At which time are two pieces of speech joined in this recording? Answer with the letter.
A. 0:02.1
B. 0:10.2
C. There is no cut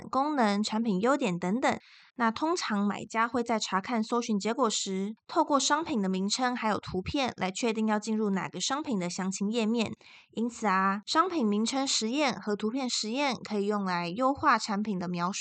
A